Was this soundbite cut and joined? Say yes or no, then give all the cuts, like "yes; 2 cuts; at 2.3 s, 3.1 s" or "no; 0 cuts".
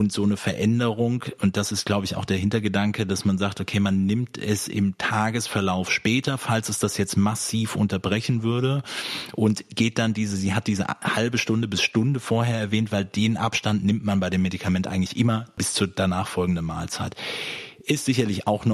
no; 0 cuts